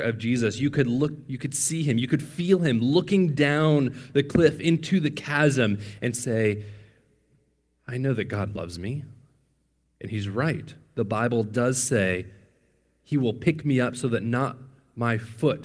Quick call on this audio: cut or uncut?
uncut